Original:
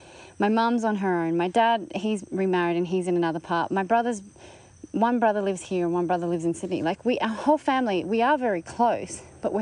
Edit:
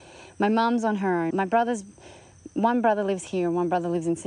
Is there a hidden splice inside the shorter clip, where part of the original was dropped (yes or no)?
yes